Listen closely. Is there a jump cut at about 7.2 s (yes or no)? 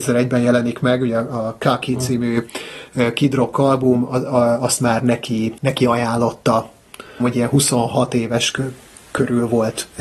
yes